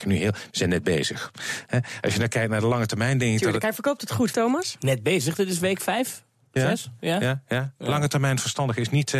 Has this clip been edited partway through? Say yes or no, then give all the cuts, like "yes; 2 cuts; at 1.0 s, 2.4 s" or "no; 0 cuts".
yes; 1 cut; at 4.3 s